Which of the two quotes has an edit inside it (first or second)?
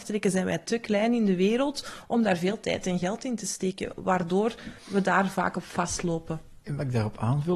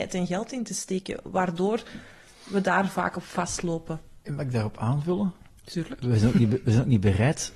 first